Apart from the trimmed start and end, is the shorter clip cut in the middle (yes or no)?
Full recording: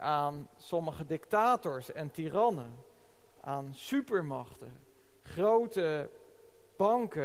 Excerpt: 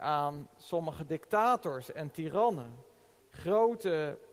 yes